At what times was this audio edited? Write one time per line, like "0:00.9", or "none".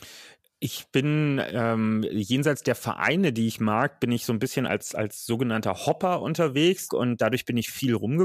0:06.9